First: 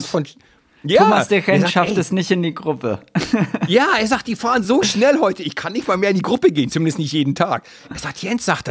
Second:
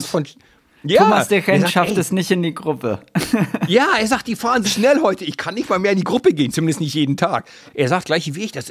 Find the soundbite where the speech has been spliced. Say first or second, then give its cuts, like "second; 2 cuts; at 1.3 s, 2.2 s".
second; 2 cuts; at 4.6 s, 7.7 s